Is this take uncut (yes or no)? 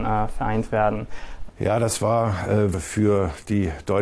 no